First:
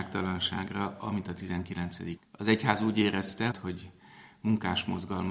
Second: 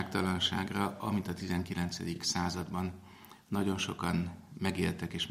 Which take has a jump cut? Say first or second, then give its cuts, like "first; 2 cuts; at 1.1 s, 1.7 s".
first; 2 cuts; at 2.2 s, 3.5 s